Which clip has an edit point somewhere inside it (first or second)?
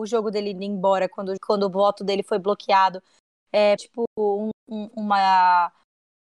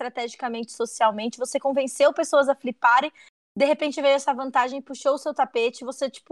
first